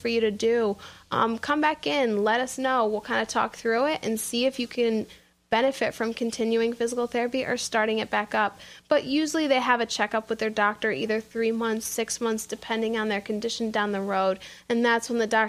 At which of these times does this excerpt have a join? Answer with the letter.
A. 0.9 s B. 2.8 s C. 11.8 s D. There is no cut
D